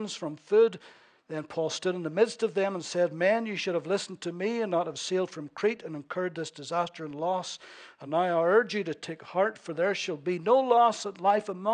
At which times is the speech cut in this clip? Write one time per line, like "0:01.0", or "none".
none